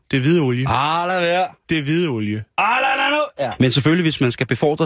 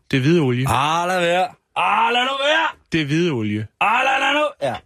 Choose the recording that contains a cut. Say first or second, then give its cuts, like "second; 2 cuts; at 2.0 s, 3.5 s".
first; 2 cuts; at 1.6 s, 3.6 s